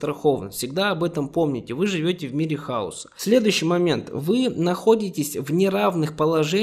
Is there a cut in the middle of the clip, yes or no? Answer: no